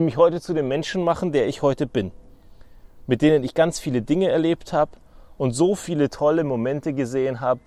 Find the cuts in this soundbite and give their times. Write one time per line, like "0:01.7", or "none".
none